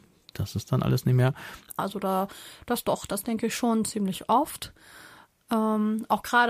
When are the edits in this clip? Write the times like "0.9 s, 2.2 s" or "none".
1.8 s